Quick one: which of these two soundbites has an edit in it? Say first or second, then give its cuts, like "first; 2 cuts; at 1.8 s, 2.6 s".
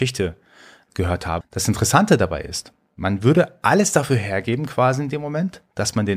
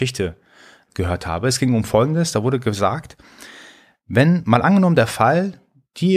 first; 1 cut; at 1.4 s